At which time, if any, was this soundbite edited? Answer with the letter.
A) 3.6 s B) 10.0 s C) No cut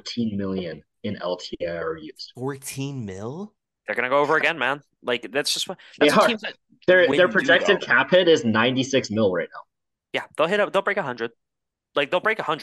C